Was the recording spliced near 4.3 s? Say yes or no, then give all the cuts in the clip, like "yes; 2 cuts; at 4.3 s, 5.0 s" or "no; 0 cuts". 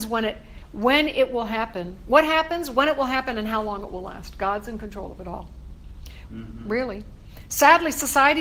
no; 1 cut; at 6.3 s